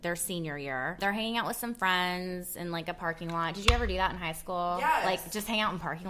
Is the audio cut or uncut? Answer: uncut